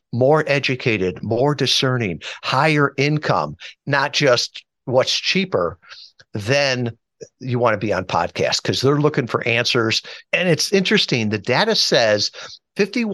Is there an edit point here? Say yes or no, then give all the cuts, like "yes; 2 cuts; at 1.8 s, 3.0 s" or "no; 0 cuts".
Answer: yes; 2 cuts; at 3.7 s, 10.2 s